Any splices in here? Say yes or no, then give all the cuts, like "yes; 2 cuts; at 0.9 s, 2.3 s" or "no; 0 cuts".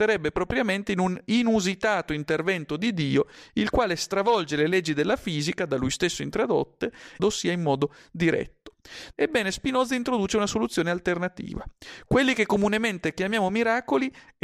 yes; 2 cuts; at 7.2 s, 9.1 s